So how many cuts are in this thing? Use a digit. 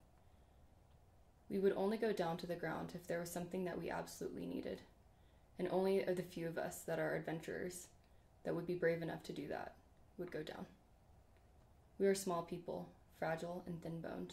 1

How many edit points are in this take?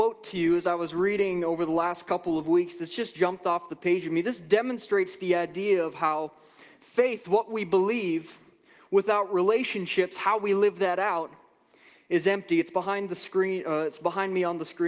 0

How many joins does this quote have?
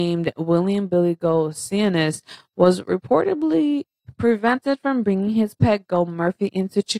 0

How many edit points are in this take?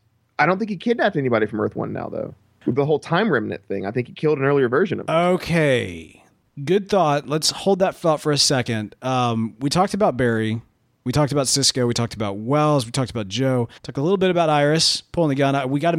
1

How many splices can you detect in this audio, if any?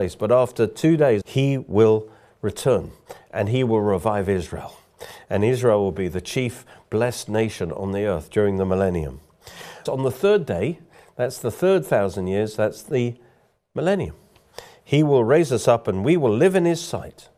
2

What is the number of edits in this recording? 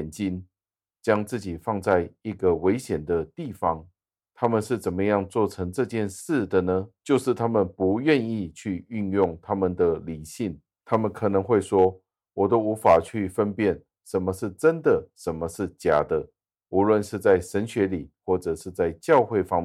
0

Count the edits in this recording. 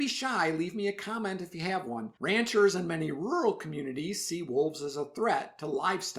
1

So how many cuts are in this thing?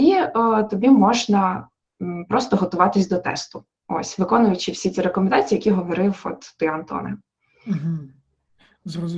0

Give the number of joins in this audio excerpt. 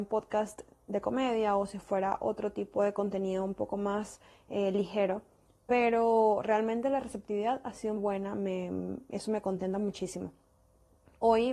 1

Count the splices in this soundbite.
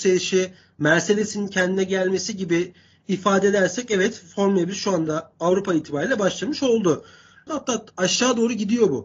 1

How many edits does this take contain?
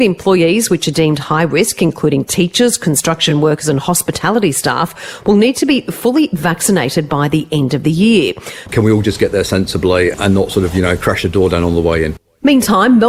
1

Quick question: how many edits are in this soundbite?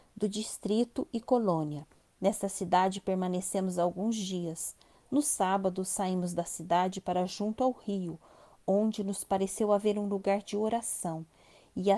0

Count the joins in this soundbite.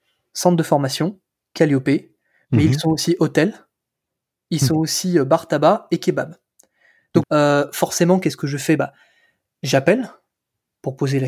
1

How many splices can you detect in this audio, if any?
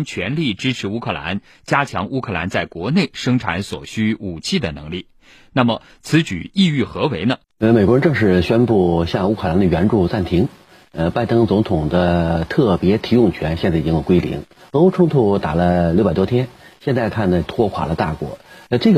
3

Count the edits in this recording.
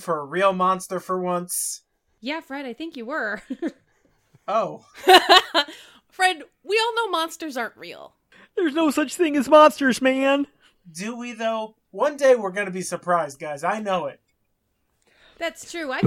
0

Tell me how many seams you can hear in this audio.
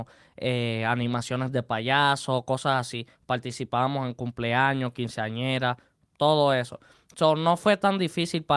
0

